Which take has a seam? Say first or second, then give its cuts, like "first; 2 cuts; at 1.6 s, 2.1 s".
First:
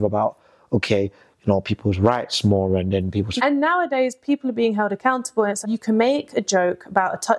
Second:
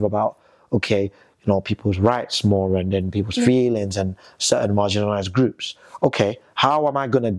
first; 2 cuts; at 3.4 s, 5.6 s